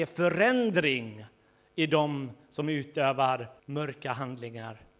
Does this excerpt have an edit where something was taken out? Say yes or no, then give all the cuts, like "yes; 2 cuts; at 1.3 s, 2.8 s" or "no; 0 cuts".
yes; 1 cut; at 3.6 s